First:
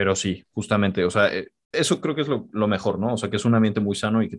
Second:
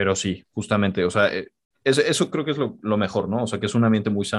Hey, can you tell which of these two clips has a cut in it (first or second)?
first